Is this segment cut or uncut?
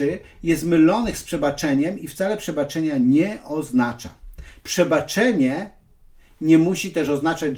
cut